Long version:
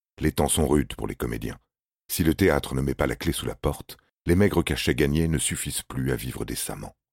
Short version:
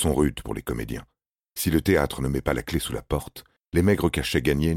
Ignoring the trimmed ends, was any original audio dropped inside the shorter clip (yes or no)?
no